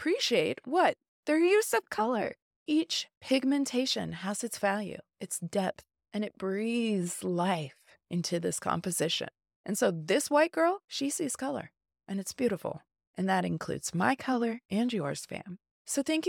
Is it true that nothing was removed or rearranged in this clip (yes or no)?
yes